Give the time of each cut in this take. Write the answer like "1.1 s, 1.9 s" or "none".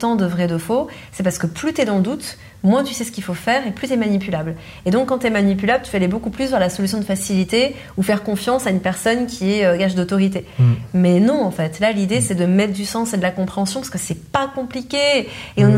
none